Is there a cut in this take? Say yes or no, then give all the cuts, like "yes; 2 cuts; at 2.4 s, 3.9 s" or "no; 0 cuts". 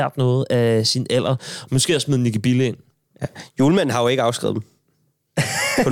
no; 0 cuts